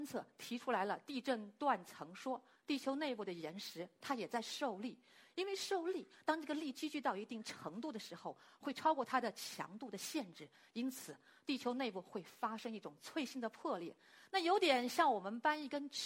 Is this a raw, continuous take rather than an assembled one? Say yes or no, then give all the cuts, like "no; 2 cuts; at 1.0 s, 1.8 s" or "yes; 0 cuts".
no; 1 cut; at 2.6 s